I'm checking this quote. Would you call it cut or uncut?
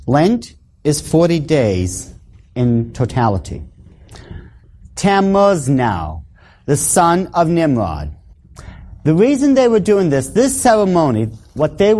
cut